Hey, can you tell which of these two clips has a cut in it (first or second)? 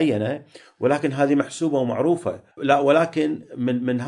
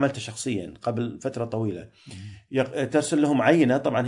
first